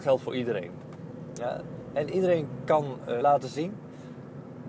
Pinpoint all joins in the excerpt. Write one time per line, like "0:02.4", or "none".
0:03.2